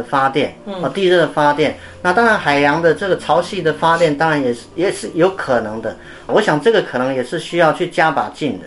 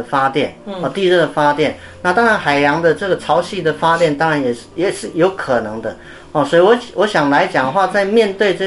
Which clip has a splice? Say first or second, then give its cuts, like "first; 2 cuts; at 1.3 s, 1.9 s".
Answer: first; 1 cut; at 6.3 s